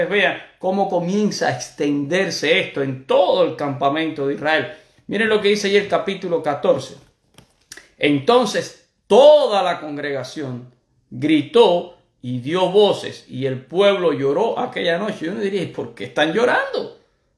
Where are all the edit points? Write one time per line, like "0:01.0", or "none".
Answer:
none